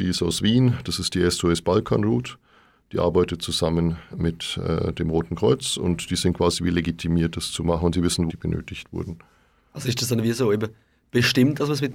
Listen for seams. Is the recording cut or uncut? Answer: cut